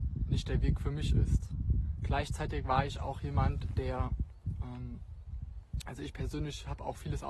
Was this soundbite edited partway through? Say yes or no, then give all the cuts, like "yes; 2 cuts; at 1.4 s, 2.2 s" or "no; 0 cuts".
no; 0 cuts